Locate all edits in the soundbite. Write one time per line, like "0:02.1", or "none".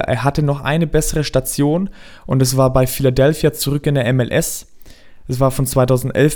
none